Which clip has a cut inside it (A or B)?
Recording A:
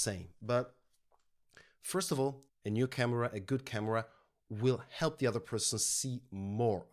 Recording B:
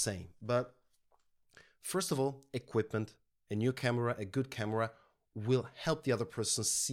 A